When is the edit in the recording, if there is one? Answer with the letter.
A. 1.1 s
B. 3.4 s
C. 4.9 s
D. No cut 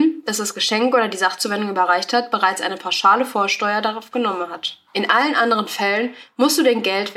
C